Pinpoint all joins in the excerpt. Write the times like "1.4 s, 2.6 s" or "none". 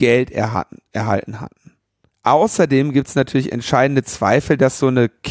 2.1 s